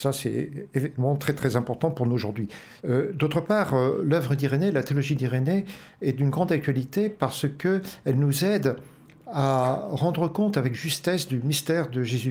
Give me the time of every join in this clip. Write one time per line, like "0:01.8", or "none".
0:02.8